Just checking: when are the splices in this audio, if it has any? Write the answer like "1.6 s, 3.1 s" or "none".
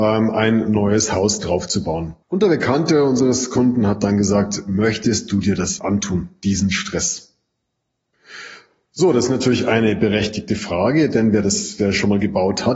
2.2 s, 5.8 s